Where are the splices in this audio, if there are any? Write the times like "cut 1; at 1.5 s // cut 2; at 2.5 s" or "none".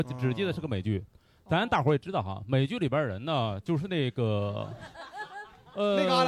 none